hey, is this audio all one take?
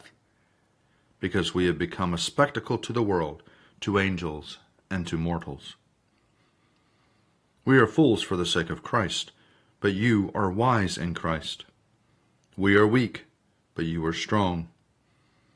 yes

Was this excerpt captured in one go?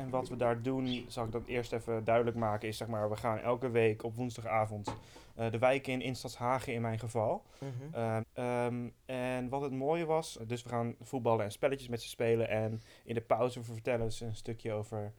no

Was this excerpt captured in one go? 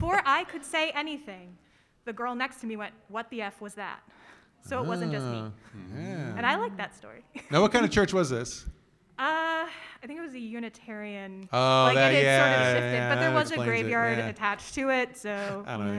yes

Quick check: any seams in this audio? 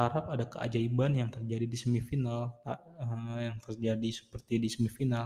no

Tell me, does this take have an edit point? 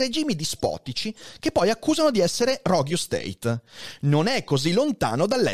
no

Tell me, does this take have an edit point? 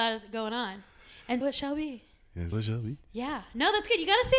yes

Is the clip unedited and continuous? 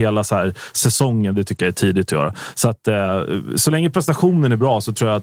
yes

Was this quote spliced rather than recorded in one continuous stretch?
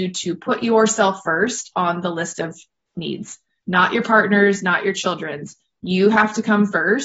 no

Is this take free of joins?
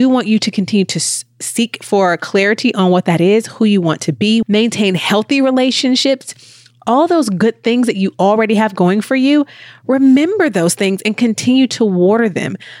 no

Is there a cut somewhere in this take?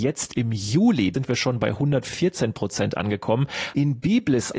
yes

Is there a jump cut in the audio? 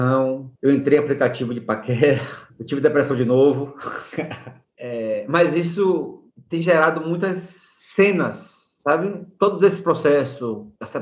no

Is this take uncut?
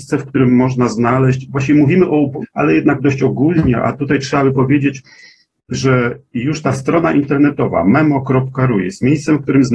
no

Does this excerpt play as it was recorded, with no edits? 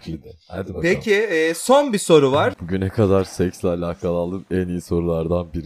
no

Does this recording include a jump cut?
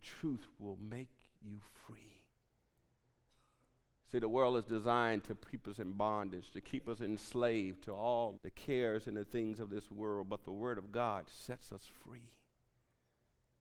yes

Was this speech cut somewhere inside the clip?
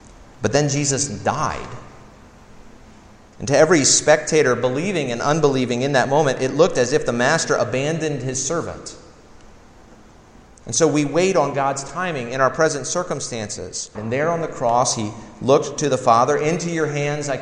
yes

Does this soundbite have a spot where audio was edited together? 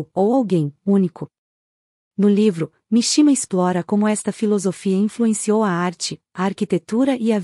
no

